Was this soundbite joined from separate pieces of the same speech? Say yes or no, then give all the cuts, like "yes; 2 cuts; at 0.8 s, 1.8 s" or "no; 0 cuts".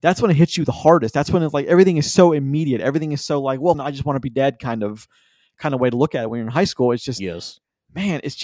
yes; 1 cut; at 3.7 s